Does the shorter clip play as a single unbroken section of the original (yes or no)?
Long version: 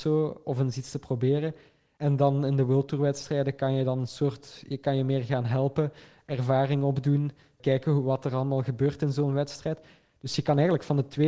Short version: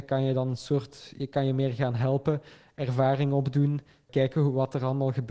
yes